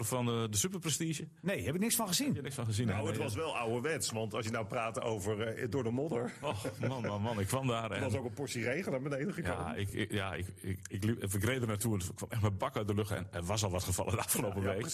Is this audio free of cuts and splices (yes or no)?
yes